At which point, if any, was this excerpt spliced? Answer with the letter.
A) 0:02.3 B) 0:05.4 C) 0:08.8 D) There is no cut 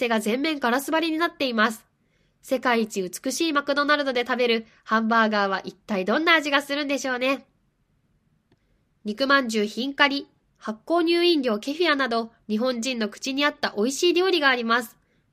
C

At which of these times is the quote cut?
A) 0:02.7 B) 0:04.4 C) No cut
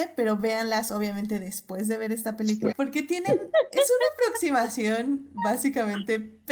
A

